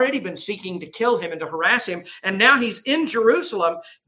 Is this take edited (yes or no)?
no